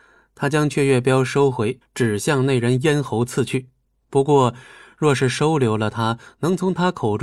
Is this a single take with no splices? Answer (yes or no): no